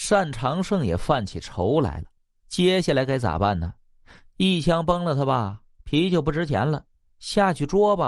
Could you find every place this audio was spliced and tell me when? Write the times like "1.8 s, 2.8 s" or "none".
none